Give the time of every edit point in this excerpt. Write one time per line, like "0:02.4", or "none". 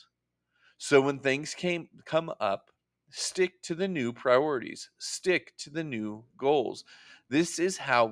none